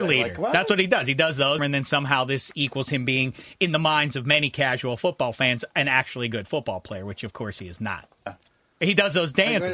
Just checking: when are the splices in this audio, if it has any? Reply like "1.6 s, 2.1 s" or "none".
1.6 s, 8.3 s